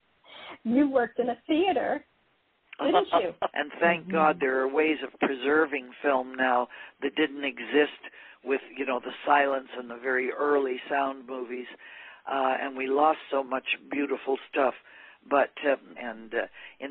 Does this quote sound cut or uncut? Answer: cut